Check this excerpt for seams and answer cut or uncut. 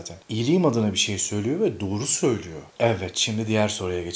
uncut